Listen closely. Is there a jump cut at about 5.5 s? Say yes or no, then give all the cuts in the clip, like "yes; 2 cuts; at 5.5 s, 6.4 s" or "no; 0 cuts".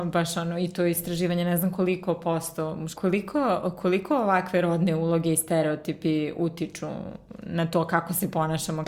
no; 1 cut; at 2.9 s